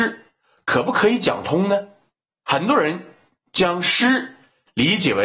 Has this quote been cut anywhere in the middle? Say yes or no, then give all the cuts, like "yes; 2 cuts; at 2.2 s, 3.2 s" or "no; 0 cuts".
yes; 1 cut; at 2.3 s